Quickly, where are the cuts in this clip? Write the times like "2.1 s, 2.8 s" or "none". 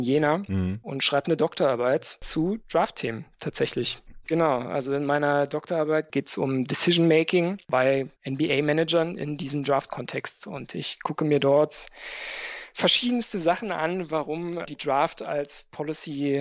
4.2 s